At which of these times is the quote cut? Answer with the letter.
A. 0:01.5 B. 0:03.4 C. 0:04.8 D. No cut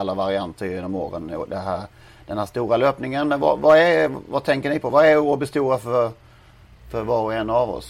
D